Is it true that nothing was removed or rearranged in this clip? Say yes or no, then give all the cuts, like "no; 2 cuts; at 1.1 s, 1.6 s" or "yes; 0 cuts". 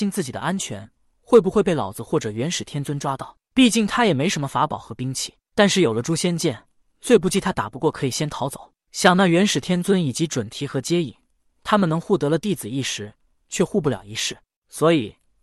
no; 2 cuts; at 8.8 s, 14.5 s